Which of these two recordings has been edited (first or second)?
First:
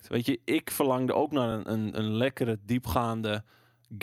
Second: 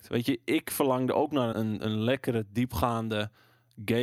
second